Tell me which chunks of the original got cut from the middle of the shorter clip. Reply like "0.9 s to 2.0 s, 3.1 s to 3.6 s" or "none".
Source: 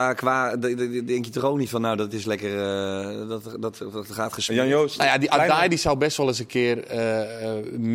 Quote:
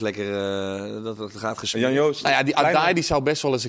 3.4 s to 3.9 s